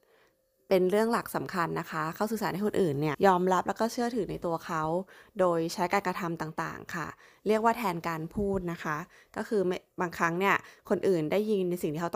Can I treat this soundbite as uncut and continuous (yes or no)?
no